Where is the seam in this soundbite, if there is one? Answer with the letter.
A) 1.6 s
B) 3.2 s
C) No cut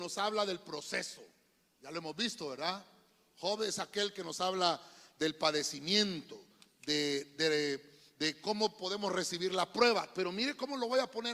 C